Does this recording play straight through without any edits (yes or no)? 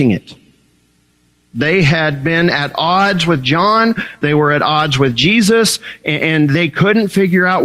yes